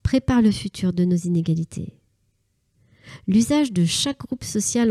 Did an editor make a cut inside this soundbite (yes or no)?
no